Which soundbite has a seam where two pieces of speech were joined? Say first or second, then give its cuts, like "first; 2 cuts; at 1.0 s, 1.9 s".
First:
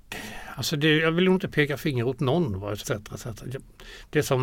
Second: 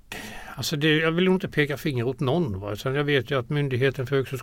first; 1 cut; at 2.8 s